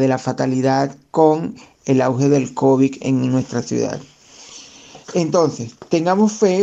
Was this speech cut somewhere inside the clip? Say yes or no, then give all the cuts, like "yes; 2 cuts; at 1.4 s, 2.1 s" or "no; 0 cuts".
yes; 2 cuts; at 3.0 s, 5.0 s